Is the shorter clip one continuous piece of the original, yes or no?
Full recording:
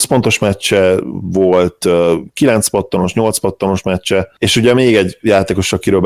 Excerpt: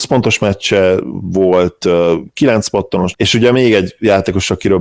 no